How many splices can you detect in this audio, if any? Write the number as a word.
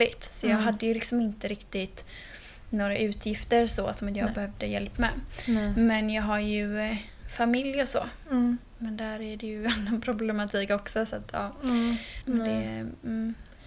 two